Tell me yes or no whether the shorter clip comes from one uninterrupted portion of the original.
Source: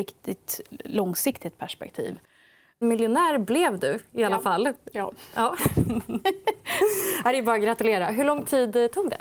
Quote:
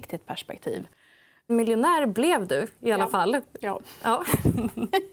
yes